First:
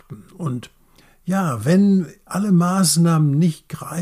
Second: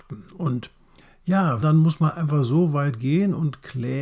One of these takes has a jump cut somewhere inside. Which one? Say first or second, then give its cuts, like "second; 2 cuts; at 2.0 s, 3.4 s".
second; 1 cut; at 1.6 s